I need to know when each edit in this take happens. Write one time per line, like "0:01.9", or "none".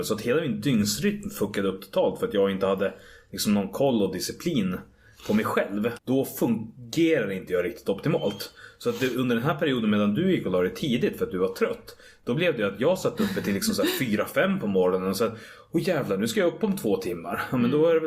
0:06.0